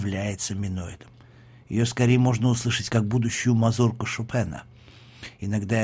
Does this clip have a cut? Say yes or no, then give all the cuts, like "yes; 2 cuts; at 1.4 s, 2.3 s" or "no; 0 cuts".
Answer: no; 0 cuts